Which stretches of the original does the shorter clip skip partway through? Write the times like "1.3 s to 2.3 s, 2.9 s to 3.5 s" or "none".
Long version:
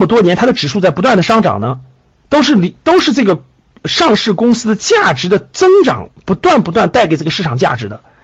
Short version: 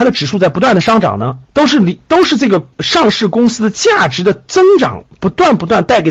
1.9 s to 2.2 s, 3.5 s to 3.8 s